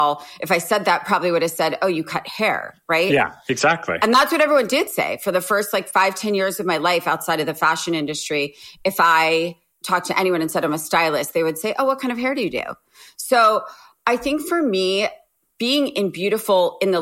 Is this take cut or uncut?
uncut